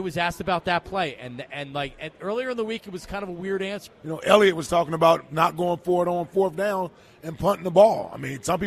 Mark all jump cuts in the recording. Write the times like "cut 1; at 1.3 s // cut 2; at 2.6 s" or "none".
cut 1; at 3.9 s